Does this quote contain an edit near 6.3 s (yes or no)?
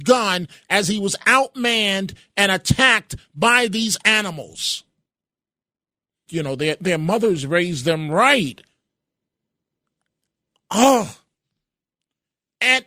yes